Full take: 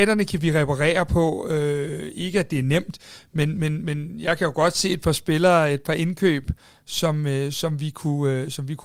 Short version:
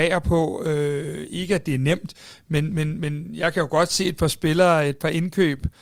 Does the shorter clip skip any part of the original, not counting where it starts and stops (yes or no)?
no